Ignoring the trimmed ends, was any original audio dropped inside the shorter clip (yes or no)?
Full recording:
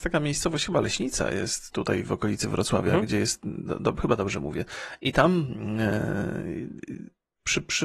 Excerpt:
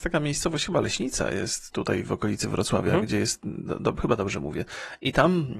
no